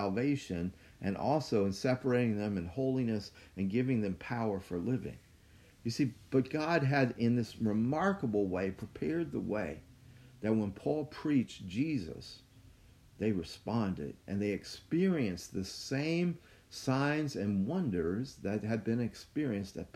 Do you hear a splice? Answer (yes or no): no